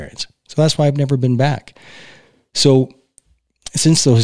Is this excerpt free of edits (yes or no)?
yes